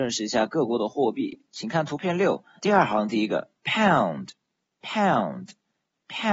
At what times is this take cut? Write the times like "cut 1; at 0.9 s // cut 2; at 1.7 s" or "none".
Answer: cut 1; at 2.6 s // cut 2; at 4.7 s